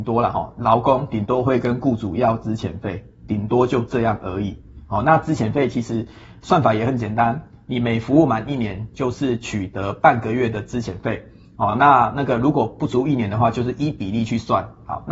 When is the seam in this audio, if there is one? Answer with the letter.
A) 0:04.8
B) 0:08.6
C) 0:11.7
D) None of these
D